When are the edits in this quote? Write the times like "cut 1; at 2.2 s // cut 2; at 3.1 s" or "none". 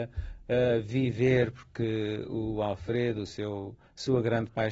none